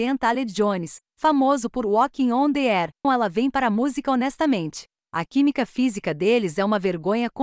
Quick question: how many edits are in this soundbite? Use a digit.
2